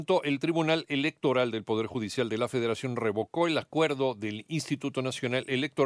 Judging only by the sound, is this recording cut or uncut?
uncut